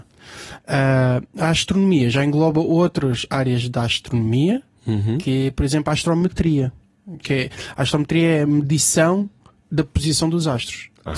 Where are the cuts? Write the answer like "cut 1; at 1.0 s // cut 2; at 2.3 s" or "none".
cut 1; at 7.2 s